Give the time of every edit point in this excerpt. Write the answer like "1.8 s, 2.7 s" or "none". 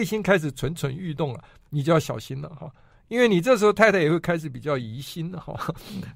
none